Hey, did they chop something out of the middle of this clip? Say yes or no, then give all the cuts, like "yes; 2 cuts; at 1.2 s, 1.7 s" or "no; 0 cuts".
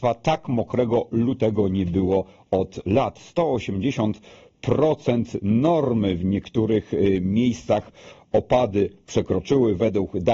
no; 0 cuts